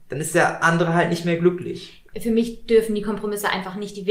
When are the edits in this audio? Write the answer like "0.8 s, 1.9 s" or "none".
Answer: 2.1 s